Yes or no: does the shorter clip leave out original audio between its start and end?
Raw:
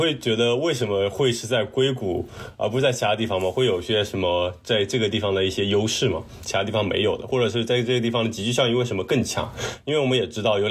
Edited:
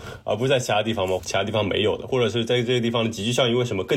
yes